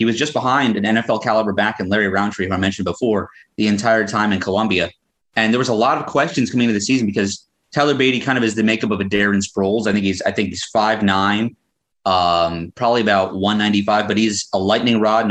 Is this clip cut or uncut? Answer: uncut